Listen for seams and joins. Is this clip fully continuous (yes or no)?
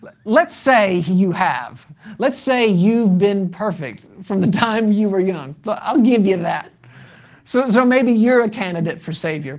yes